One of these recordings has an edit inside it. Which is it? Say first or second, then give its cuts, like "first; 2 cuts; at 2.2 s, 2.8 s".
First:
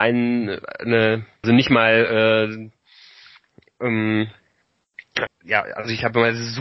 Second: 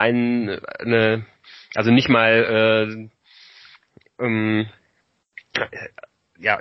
first; 2 cuts; at 1.4 s, 5.3 s